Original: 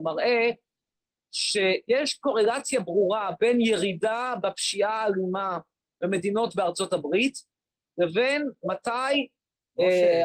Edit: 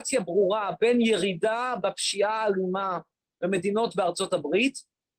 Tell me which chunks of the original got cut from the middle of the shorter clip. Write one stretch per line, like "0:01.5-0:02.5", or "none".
none